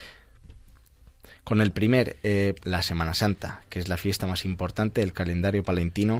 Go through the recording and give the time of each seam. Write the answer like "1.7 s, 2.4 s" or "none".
2.6 s